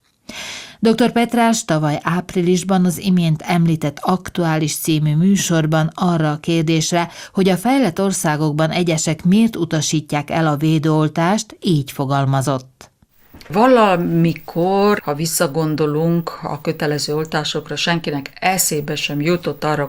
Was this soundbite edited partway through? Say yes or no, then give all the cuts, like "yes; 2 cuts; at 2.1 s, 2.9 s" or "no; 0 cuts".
yes; 1 cut; at 15.0 s